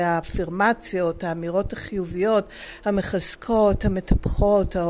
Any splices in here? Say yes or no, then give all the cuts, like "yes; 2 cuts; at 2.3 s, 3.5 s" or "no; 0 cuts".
no; 0 cuts